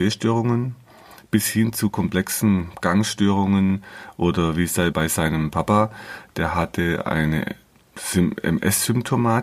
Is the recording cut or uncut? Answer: cut